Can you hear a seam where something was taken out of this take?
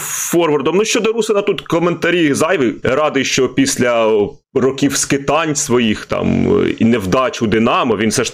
yes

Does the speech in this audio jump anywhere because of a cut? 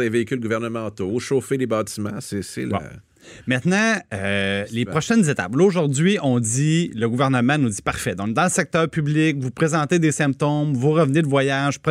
no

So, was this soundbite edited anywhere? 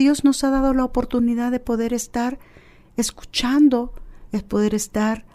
no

